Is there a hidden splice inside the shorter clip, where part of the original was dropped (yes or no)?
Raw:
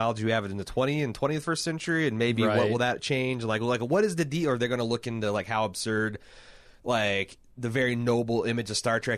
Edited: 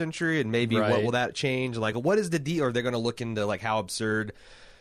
yes